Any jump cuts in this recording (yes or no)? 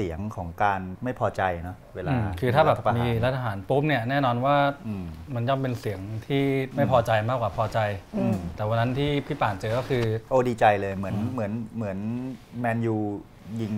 no